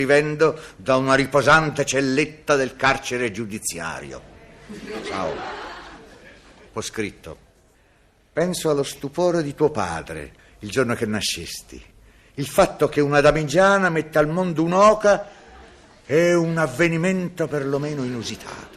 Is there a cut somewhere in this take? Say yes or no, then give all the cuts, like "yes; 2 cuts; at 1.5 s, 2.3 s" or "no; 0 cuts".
no; 0 cuts